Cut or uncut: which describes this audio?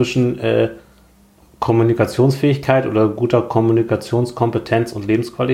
uncut